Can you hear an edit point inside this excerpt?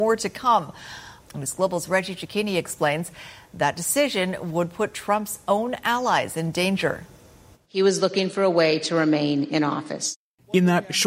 yes; 1 cut; at 1.2 s

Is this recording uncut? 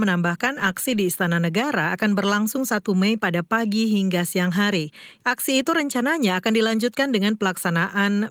no; 1 cut; at 5.2 s

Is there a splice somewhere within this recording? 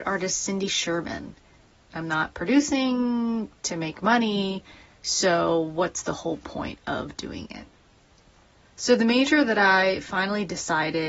yes; 1 cut; at 1.8 s

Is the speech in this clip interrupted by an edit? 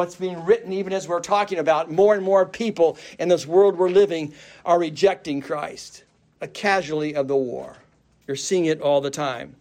no; 0 cuts

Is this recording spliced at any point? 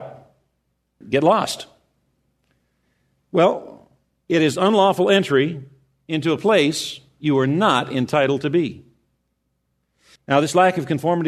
yes; 2 cuts; at 1.0 s, 10.2 s

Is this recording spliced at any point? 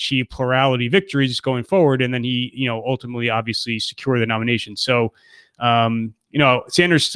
no; 0 cuts

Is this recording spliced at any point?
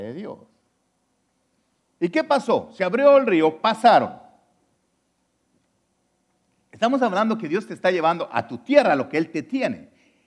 no; 0 cuts

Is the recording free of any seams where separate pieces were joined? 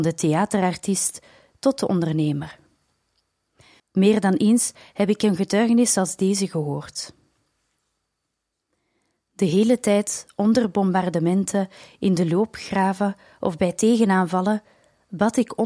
no; 1 cut; at 3.8 s

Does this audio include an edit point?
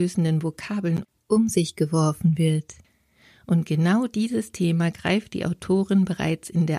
no; 0 cuts

